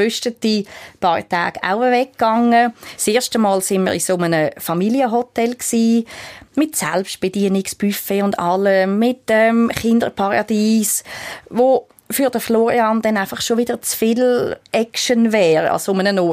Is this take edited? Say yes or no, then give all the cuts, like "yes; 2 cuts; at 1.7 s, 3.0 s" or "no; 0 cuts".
no; 0 cuts